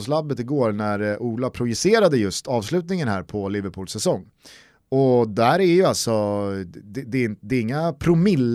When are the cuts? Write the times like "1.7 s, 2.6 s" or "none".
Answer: none